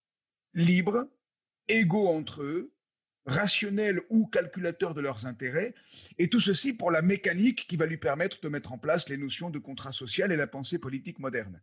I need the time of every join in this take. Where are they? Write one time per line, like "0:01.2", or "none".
none